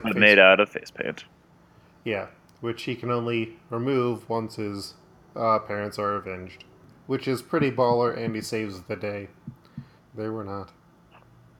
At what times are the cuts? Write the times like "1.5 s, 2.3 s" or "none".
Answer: 6.9 s, 10.0 s